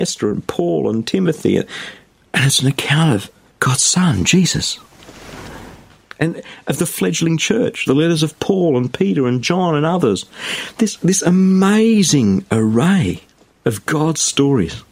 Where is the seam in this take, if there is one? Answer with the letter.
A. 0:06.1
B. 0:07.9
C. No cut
B